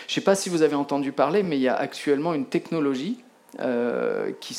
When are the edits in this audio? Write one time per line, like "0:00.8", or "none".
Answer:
none